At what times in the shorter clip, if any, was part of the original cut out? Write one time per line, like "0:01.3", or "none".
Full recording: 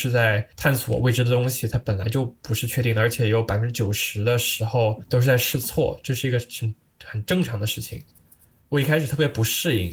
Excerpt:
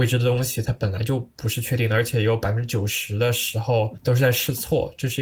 none